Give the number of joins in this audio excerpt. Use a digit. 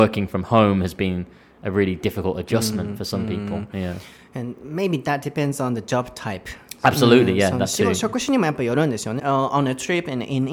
1